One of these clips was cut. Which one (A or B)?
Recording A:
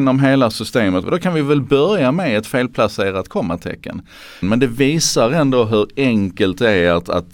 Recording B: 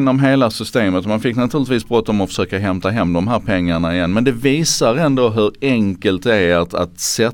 A